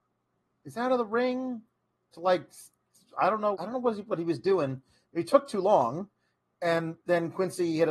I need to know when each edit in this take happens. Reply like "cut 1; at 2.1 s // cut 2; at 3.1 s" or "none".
cut 1; at 3.5 s